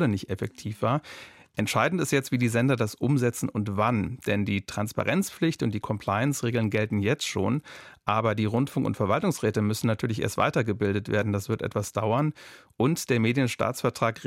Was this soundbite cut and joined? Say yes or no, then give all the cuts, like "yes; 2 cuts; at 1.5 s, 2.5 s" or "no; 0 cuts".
no; 0 cuts